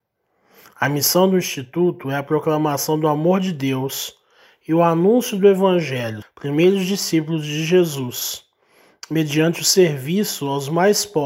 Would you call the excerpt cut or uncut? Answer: cut